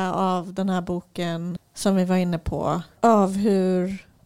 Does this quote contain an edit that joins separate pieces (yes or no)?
yes